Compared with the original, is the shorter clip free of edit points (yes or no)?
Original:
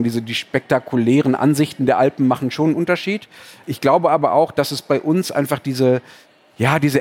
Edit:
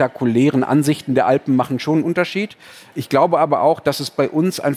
yes